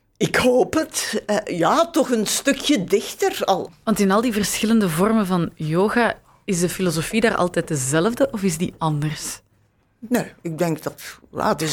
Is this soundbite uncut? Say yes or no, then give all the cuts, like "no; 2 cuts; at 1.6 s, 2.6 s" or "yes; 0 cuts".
no; 1 cut; at 3.7 s